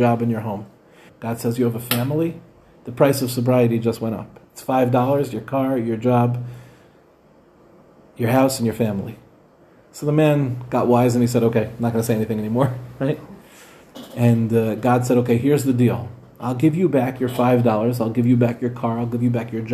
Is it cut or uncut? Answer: cut